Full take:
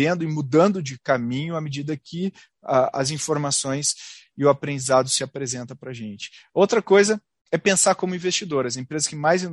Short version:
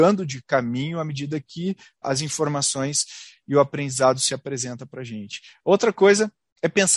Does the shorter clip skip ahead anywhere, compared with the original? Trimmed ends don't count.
yes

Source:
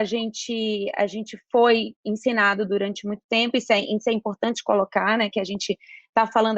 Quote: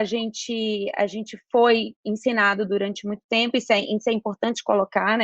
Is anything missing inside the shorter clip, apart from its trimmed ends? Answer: no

